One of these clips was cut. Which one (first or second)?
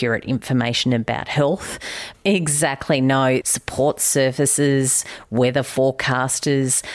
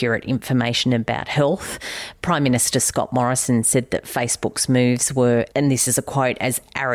first